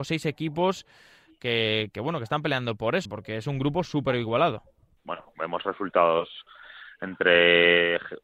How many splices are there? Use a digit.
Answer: 2